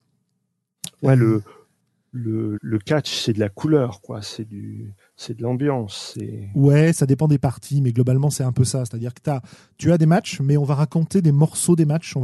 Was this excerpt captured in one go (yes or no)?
no